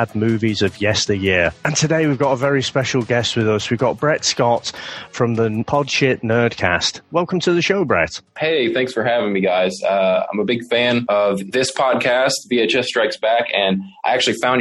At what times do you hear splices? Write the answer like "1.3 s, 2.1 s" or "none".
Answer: none